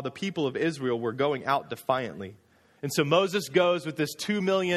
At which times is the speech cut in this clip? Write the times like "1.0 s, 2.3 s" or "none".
2.8 s